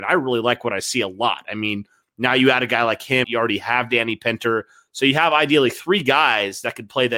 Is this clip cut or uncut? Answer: cut